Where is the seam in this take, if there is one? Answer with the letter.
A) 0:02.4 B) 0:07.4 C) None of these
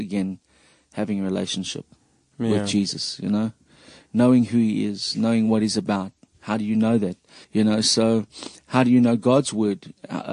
B